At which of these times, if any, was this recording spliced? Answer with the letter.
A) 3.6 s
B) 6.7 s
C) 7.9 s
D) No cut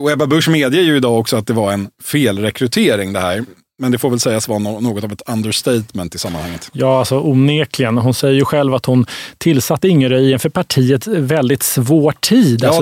D